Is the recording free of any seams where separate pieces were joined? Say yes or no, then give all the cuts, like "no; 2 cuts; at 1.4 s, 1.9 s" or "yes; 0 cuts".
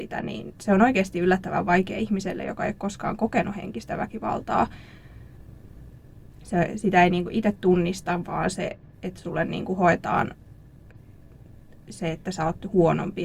yes; 0 cuts